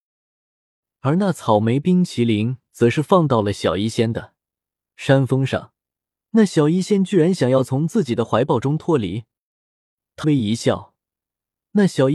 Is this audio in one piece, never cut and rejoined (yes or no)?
no